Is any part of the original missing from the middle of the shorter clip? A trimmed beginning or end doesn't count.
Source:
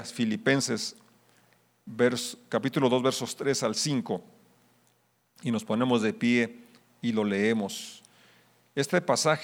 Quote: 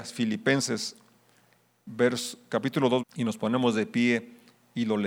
yes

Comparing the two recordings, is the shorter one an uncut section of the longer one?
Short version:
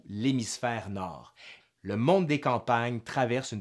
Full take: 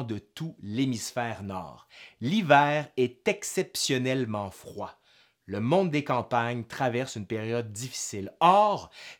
no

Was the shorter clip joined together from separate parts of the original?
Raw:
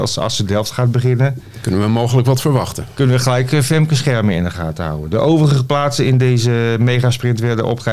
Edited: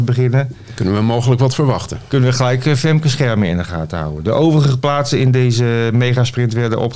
no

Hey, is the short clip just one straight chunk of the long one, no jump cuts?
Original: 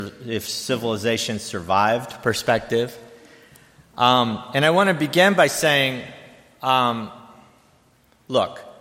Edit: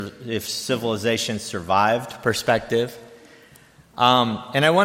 yes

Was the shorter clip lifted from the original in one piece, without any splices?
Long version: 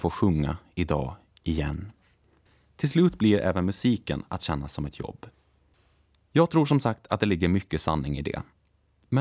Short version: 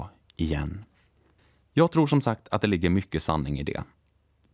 no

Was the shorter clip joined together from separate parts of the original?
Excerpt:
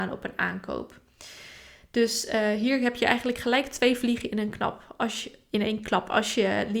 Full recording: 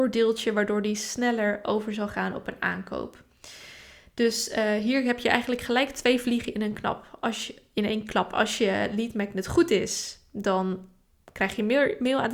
no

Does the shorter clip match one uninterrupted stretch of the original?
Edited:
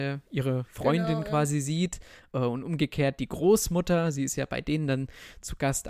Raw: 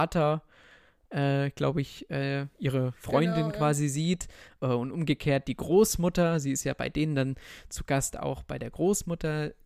yes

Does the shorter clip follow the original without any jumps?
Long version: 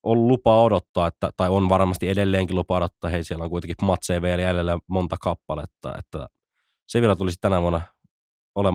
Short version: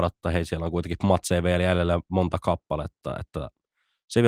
yes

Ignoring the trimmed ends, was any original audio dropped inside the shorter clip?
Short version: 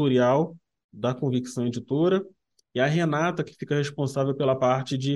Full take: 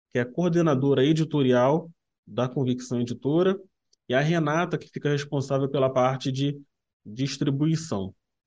no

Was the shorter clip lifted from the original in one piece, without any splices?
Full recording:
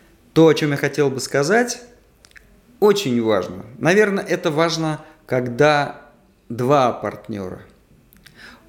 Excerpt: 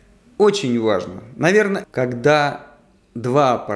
no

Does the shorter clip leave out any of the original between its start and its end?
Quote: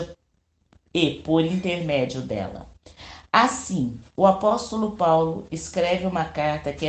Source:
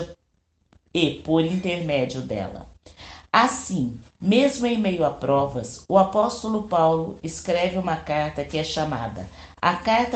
yes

